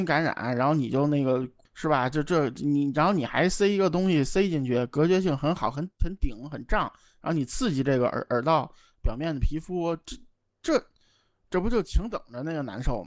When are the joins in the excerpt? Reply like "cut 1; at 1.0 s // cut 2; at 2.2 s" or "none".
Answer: none